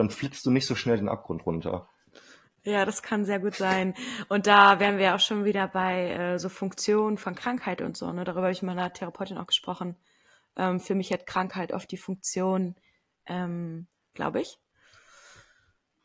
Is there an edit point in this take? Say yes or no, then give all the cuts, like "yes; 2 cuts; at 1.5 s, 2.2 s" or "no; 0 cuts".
yes; 1 cut; at 14.0 s